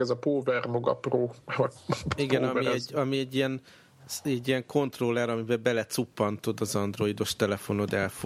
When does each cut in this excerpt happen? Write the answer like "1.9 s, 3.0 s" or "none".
none